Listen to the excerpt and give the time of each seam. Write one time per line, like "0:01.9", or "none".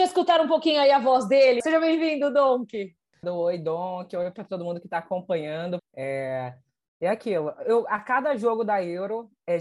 0:01.6
0:03.2
0:05.8